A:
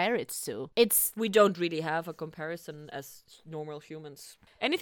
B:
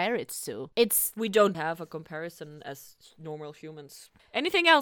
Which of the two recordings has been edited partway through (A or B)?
B